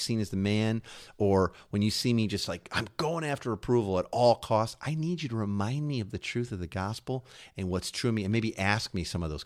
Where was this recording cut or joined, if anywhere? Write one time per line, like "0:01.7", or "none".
none